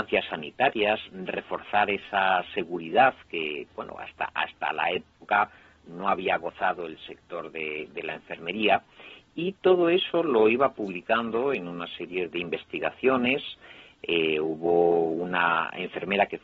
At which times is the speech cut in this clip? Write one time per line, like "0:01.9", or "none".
0:12.3